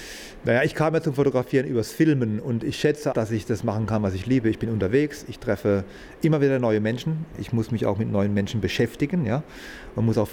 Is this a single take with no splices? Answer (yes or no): no